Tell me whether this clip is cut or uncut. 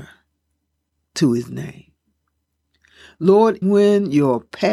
cut